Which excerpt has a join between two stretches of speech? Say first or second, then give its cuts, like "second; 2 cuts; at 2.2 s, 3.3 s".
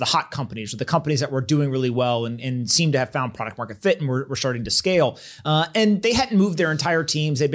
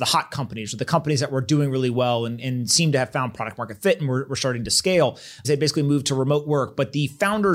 second; 1 cut; at 5.4 s